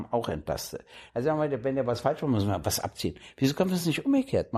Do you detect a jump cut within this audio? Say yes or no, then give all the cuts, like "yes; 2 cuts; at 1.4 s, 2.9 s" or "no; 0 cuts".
yes; 1 cut; at 1.1 s